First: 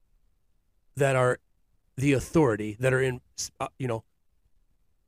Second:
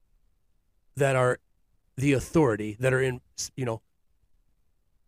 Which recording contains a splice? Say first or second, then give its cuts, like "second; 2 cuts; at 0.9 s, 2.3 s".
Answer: second; 1 cut; at 3.5 s